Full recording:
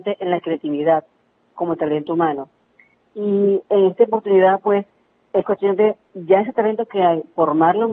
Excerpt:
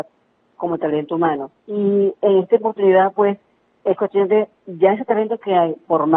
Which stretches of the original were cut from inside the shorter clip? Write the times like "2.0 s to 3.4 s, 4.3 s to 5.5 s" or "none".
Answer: 2.6 s to 3.1 s